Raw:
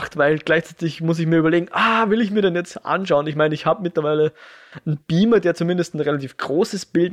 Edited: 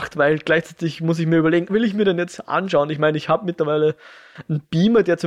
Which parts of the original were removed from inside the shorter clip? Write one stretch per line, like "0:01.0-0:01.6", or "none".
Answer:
0:01.7-0:02.1